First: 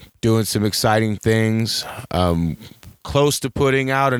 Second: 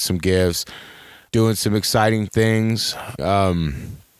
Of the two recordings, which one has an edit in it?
second; 2 cuts; at 1.3 s, 3.2 s

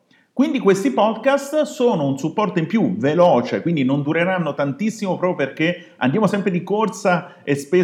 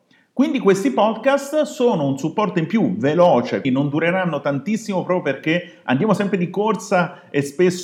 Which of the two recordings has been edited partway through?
second; 1 cut; at 3.6 s

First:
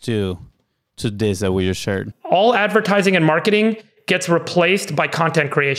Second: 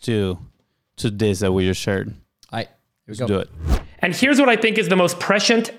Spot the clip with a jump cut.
first; 1 cut; at 2.1 s

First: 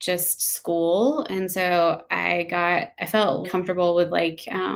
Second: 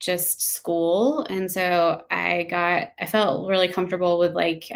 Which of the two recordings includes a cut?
first; 1 cut; at 3.4 s

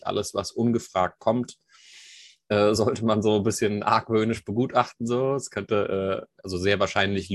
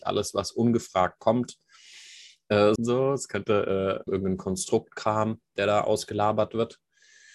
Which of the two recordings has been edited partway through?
second; 2 cuts; at 2.8 s, 4.1 s

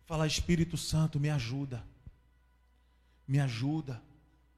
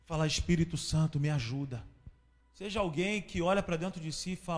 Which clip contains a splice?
second; 1 cut; at 2.4 s

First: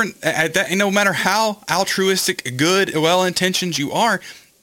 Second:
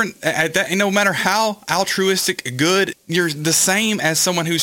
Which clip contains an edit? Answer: second; 1 cut; at 2.9 s

